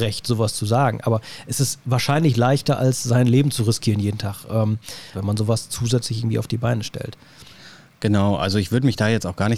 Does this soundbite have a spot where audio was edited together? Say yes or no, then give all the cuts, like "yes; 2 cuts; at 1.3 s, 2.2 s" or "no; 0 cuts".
yes; 1 cut; at 5.1 s